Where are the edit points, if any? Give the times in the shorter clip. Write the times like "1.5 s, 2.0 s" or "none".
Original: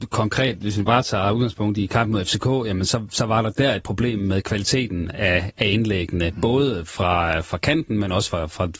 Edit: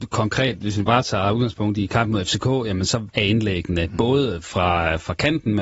3.1 s